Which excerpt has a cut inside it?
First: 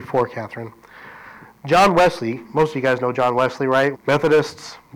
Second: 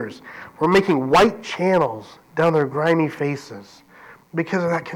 first; 1 cut; at 3.9 s

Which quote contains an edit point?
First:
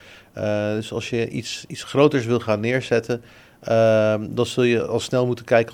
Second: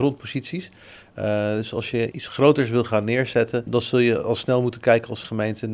second; 2 cuts; at 2.1 s, 3.7 s

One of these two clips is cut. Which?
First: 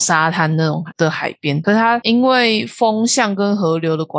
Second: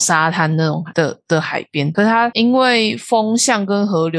first; 1 cut; at 0.9 s

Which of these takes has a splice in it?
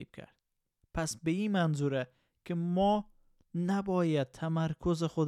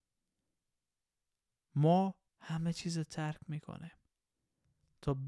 second; 1 cut; at 2.3 s

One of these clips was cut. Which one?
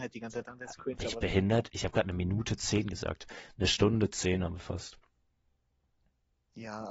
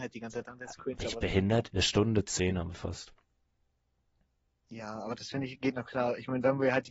second; 1 cut; at 1.7 s

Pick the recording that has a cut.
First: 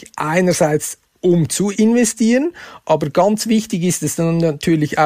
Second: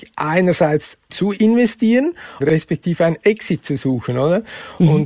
second; 2 cuts; at 1.1 s, 2.4 s

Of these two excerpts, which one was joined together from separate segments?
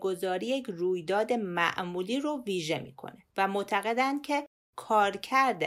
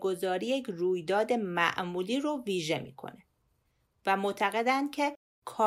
first; 1 cut; at 3.3 s

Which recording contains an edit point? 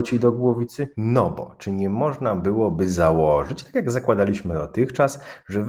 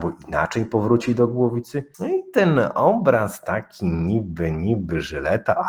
first; 1 cut; at 0.9 s

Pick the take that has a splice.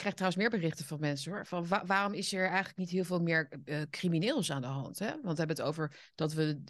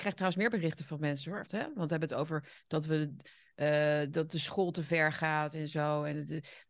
second; 1 cut; at 1.5 s

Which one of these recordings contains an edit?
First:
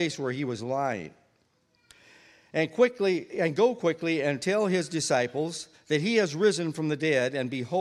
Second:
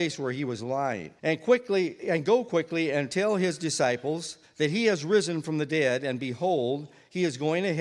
second; 1 cut; at 1.2 s

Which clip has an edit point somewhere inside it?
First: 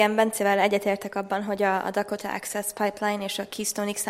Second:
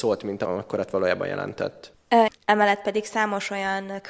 second; 1 cut; at 2.3 s

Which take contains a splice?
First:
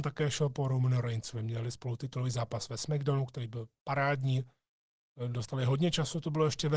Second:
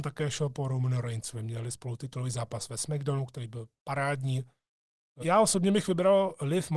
second; 1 cut; at 5.2 s

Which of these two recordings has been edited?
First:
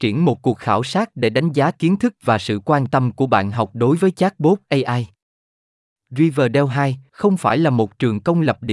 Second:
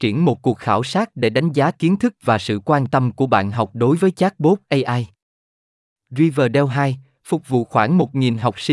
first; 1 cut; at 7.1 s

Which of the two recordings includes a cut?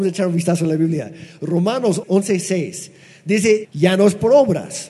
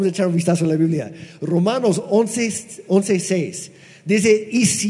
first; 2 cuts; at 2.0 s, 3.6 s

